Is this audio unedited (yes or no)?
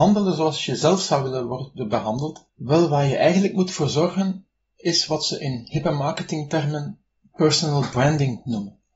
no